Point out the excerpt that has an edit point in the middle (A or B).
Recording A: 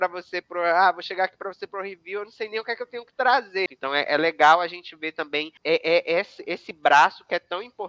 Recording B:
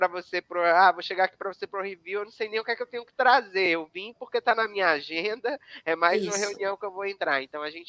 A